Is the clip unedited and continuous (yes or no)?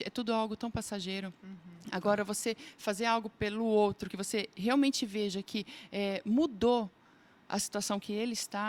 yes